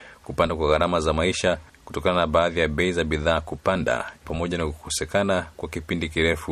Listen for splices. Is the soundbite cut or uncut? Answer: cut